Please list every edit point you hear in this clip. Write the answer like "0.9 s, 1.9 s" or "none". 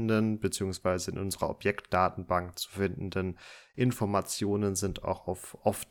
none